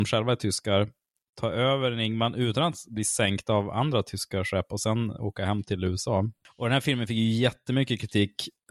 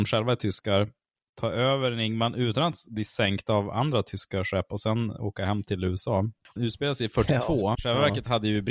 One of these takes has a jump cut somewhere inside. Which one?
second; 2 cuts; at 6.6 s, 7.7 s

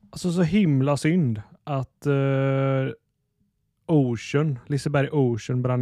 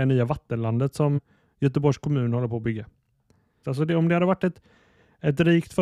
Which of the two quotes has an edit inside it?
second; 2 cuts; at 1.2 s, 3.6 s

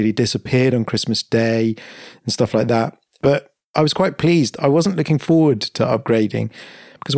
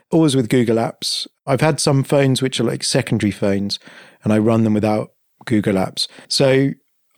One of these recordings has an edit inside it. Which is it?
second; 1 cut; at 6.2 s

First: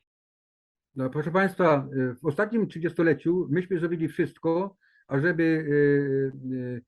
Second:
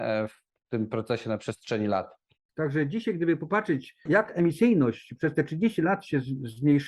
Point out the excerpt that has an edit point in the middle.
second; 2 cuts; at 2.5 s, 4.1 s

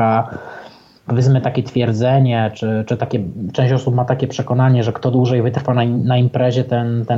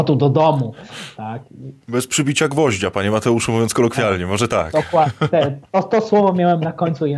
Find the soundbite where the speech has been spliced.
second; 1 cut; at 1.8 s

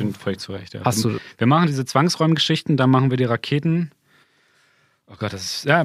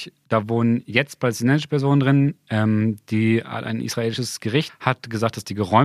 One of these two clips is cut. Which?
second; 1 cut; at 4.7 s

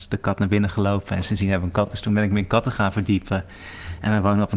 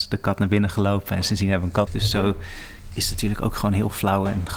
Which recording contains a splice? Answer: second; 1 cut; at 1.9 s

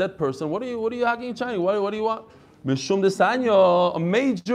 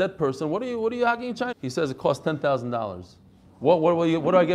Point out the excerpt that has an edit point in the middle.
second; 1 cut; at 1.5 s

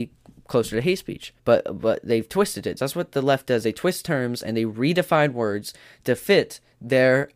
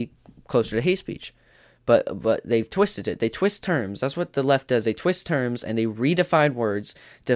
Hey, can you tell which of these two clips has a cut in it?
first; 2 cuts; at 1.4 s, 2.8 s

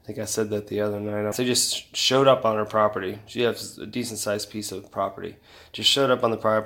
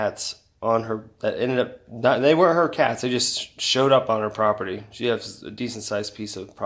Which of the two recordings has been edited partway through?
first; 1 cut; at 1.3 s

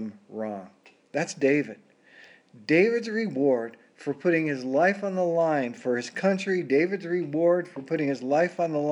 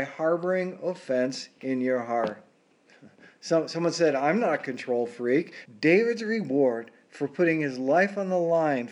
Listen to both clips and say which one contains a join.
second; 1 cut; at 5.7 s

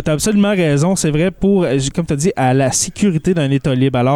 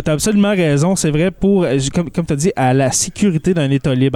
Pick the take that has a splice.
first; 1 cut; at 1.9 s

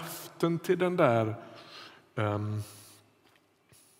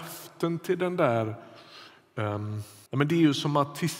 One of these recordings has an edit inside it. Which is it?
second; 1 cut; at 2.9 s

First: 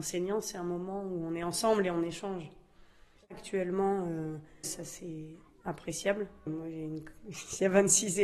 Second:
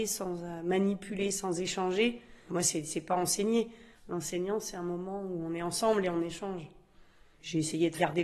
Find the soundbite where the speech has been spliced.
first; 3 cuts; at 3.2 s, 4.6 s, 6.5 s

